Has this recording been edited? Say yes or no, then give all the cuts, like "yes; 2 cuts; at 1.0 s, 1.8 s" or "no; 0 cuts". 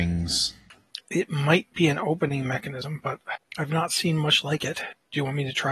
yes; 1 cut; at 1.0 s